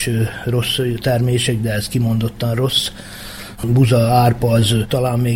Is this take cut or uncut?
cut